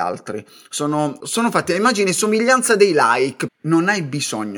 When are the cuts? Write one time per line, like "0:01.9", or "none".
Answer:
0:01.2
0:03.5